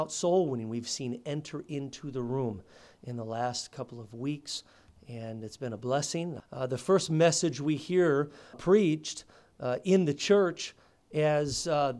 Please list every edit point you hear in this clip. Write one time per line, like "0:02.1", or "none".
0:06.4
0:08.5